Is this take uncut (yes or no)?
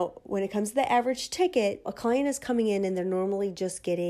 no